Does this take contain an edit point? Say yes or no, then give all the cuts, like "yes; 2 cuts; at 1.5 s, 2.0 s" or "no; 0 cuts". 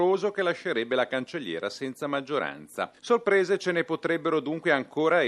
no; 0 cuts